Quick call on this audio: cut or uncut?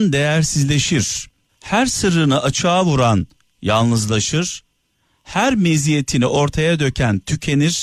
cut